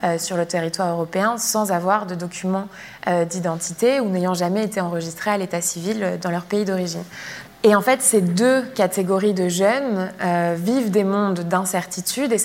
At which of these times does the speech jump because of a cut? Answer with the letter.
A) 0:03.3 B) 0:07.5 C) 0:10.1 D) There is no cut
B